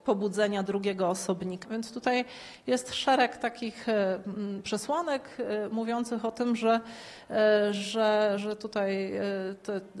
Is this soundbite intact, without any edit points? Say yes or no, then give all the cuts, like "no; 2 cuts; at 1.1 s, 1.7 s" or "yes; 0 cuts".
no; 2 cuts; at 1.6 s, 8.4 s